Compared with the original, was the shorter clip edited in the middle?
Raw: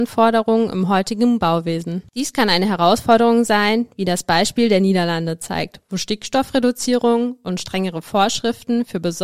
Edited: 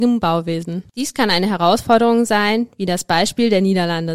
no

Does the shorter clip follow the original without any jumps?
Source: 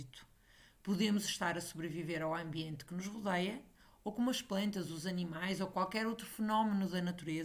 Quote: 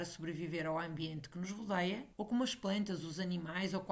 no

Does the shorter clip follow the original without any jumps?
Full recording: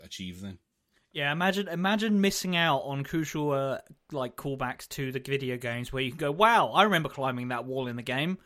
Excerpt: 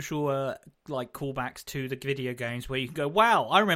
yes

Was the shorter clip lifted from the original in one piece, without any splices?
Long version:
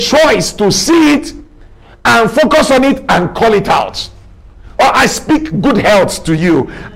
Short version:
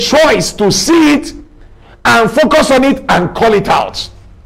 yes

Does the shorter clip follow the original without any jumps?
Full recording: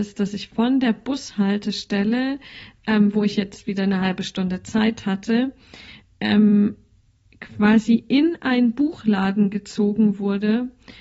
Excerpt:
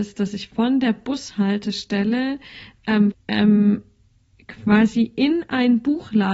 no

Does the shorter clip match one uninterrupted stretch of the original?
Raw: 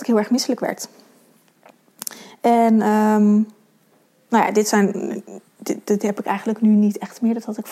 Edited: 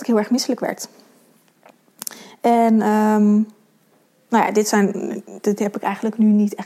no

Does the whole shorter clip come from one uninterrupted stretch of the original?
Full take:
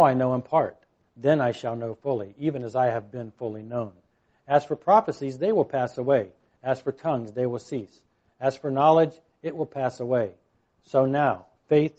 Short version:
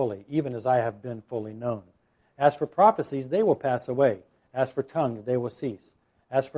yes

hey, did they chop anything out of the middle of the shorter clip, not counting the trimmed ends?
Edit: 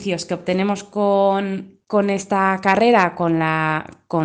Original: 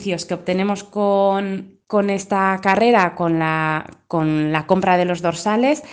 no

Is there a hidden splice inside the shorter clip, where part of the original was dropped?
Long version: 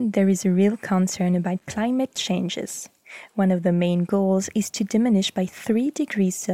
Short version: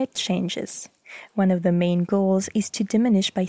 no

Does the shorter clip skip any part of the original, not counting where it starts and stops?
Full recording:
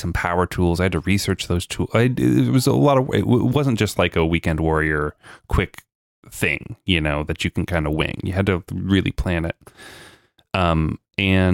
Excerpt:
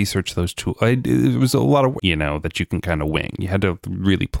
yes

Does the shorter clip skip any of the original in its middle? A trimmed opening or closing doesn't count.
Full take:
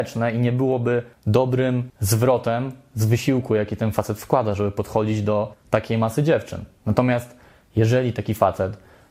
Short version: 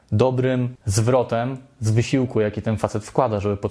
no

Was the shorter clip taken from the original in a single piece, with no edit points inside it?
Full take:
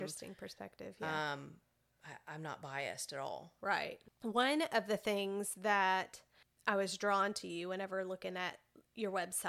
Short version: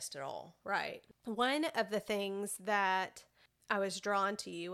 yes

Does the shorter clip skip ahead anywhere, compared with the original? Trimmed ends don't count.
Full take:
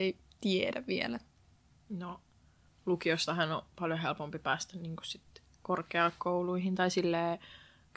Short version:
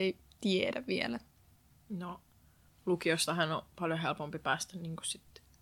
no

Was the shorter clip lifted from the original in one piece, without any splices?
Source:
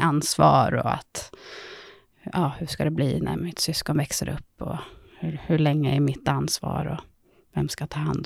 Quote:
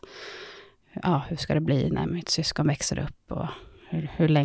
yes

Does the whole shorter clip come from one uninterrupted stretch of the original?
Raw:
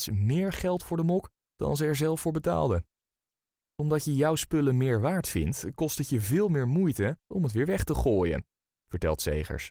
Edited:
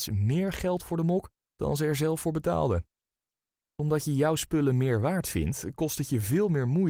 yes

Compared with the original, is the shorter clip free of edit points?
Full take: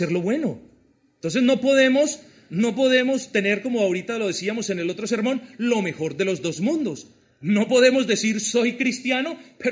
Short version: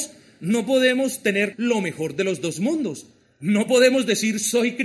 no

